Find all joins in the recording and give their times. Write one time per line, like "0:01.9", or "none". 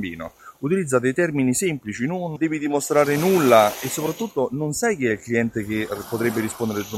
0:02.4

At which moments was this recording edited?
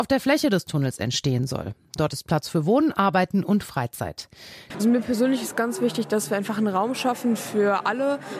0:04.7

